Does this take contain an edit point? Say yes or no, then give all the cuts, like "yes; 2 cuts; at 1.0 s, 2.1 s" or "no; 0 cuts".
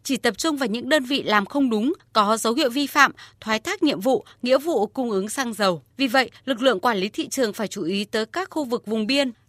yes; 1 cut; at 5.9 s